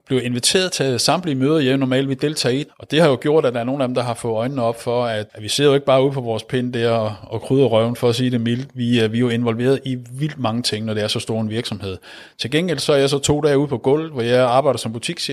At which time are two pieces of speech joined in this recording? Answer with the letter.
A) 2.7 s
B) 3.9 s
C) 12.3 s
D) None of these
A